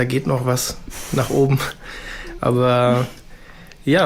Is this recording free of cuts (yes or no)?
yes